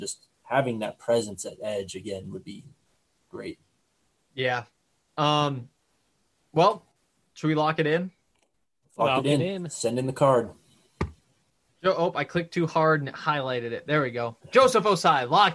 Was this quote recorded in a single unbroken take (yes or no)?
yes